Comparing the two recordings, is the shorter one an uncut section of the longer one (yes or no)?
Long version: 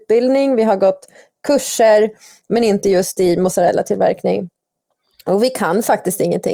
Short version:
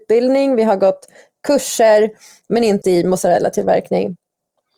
no